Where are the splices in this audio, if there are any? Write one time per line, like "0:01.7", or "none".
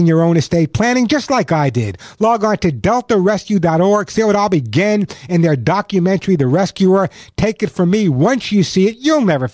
none